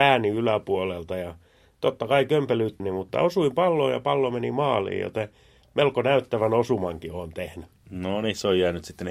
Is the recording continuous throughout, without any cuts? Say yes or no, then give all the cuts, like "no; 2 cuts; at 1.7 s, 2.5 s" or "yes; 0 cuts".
no; 1 cut; at 2.8 s